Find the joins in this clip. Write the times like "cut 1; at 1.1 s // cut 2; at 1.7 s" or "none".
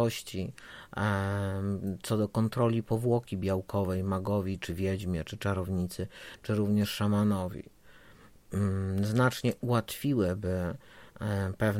none